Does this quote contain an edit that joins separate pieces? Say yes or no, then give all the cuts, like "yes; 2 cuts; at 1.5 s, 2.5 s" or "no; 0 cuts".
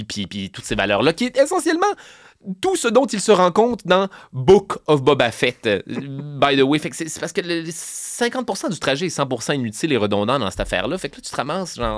no; 0 cuts